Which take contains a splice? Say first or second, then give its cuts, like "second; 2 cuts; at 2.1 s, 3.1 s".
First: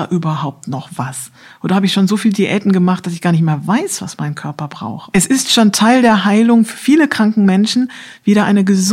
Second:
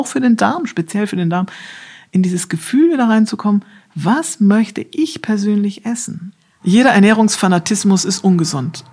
first; 1 cut; at 5.1 s